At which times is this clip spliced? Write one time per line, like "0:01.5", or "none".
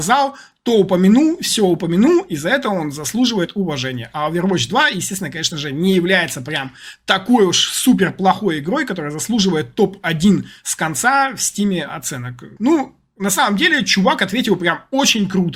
0:12.6